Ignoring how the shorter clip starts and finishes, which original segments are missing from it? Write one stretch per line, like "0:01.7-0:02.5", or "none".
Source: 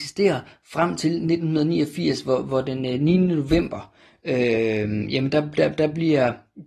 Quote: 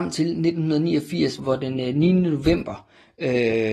0:02.2-0:02.4